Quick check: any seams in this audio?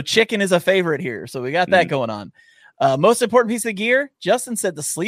no; 0 cuts

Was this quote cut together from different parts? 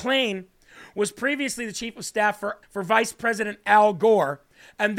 yes; 1 cut; at 2.6 s

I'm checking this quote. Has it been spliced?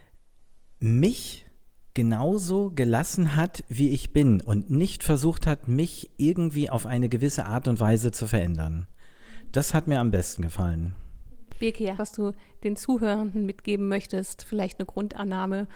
yes; 1 cut; at 12.0 s

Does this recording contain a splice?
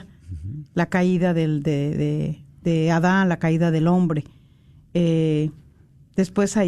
yes; 1 cut; at 1.9 s

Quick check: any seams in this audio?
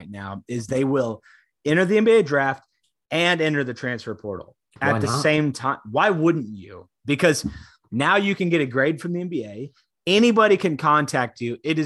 no; 0 cuts

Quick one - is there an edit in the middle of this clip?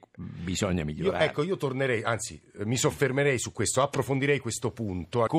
no; 0 cuts

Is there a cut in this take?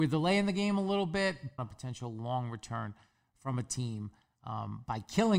yes; 1 cut; at 1.6 s

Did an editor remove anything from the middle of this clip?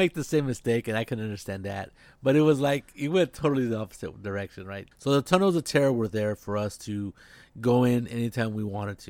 yes; 1 cut; at 4.9 s

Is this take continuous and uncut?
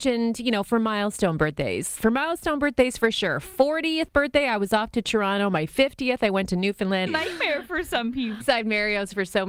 no; 3 cuts; at 2.0 s, 7.1 s, 8.4 s

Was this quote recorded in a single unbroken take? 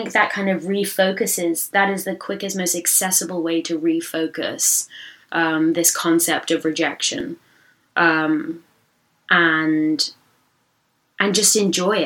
yes; 0 cuts

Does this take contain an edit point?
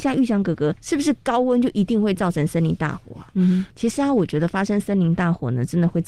yes; 1 cut; at 3.3 s

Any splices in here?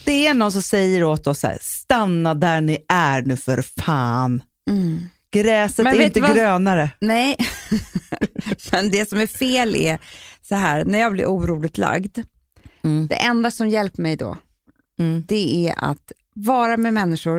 no; 0 cuts

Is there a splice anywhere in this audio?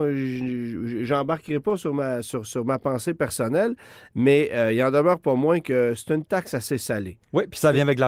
no; 0 cuts

